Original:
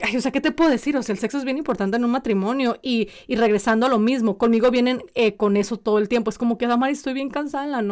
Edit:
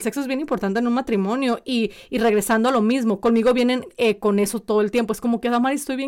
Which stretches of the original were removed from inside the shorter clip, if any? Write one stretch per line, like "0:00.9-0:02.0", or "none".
none

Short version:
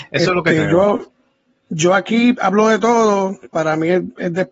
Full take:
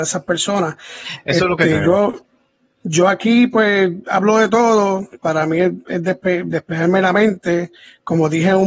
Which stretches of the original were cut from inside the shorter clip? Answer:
0:03.5-0:04.0

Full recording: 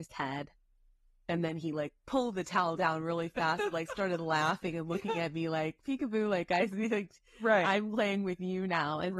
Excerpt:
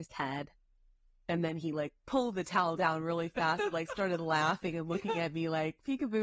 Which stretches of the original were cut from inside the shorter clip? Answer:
none

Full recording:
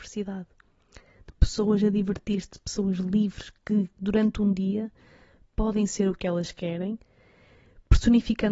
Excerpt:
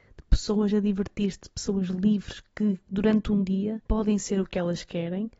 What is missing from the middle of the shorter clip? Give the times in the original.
0:05.0-0:05.5

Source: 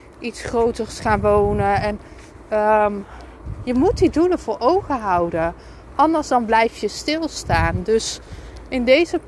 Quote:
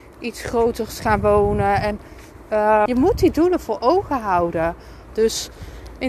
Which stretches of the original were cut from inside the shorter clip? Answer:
0:02.9-0:03.6
0:05.9-0:07.9

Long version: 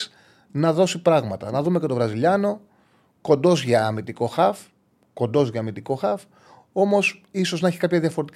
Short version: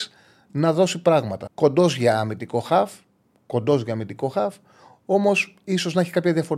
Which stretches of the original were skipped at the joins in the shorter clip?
0:01.5-0:03.1

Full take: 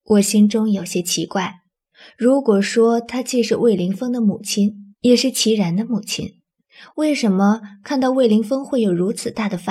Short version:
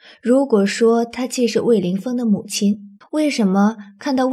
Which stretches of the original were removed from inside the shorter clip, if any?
0:05.0-0:06.8

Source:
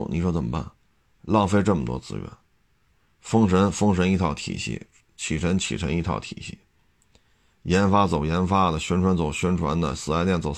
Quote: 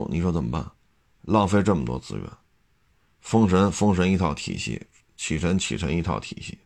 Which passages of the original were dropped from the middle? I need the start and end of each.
none

